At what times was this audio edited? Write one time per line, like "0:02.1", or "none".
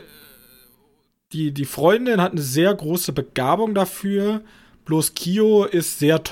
none